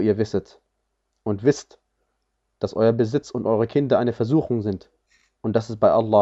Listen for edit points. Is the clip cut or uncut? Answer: uncut